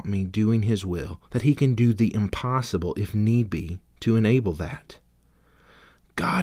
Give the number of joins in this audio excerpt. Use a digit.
1